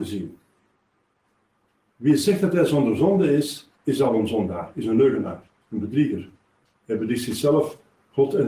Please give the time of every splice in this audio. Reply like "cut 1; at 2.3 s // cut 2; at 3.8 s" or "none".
none

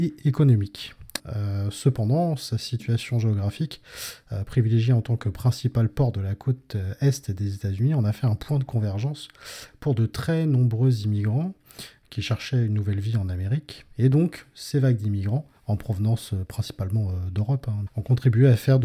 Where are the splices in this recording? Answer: cut 1; at 1.2 s // cut 2; at 15.6 s // cut 3; at 17.9 s

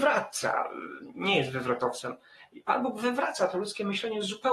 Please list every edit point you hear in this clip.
none

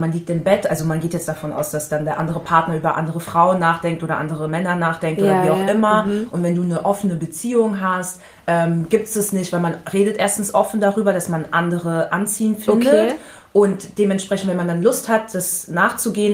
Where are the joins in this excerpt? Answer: none

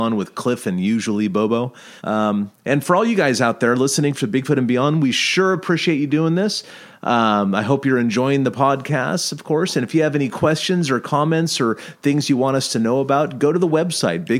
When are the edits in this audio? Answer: cut 1; at 2.0 s

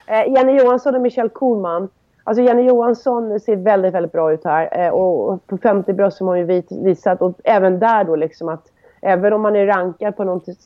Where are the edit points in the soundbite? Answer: none

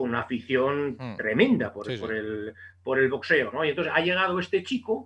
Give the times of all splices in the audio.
none

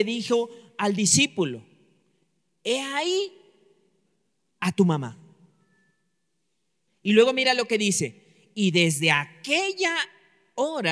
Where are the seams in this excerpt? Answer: cut 1; at 6.9 s

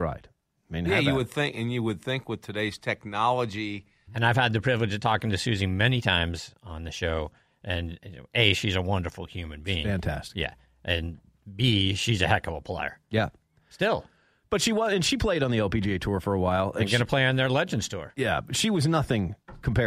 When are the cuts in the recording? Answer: cut 1; at 4.1 s

